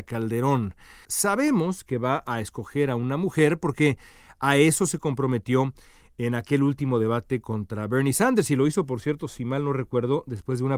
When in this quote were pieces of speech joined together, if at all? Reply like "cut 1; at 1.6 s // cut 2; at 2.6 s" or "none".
cut 1; at 1.1 s